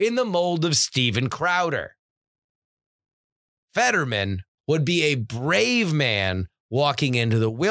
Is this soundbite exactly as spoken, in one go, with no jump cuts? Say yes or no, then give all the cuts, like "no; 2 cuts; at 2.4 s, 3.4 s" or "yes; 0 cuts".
no; 1 cut; at 4.6 s